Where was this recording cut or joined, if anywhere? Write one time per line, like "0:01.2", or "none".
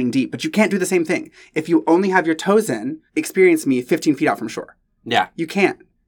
0:03.1